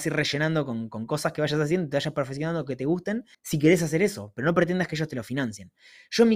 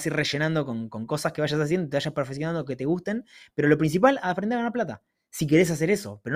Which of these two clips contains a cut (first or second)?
first